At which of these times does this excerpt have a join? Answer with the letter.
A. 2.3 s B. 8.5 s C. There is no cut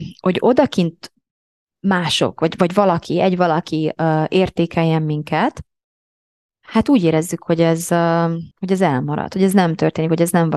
B